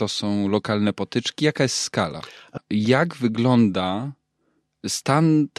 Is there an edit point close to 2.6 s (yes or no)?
yes